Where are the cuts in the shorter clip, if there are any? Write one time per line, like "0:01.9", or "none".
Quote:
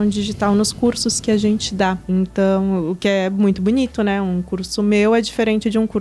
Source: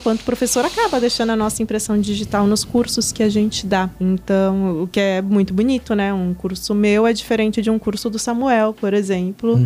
none